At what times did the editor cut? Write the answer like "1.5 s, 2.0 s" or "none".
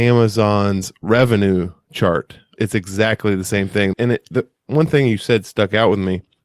2.6 s, 3.9 s

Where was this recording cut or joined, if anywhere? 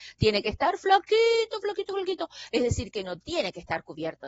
none

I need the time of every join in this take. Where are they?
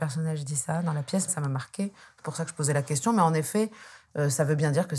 1.3 s

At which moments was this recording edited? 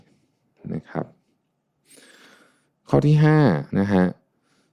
3.7 s

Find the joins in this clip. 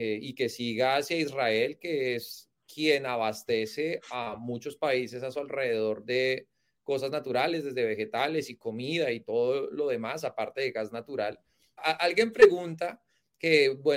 11.8 s

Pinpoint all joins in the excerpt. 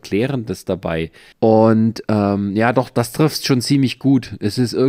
1.3 s

